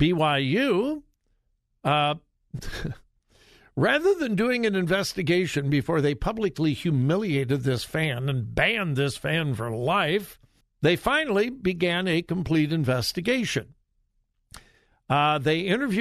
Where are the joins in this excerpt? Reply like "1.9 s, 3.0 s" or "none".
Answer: 10.6 s